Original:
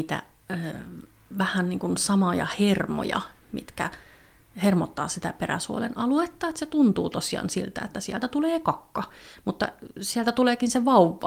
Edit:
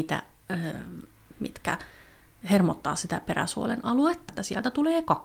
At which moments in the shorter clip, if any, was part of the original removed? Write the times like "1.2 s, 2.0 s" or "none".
1.3 s, 4.3 s